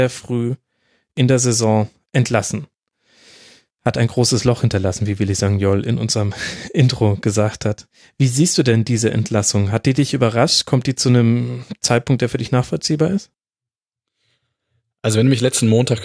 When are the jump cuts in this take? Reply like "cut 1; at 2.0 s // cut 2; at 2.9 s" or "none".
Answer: none